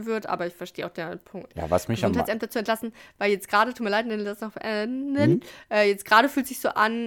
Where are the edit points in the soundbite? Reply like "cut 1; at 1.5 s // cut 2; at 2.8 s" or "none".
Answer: cut 1; at 1.5 s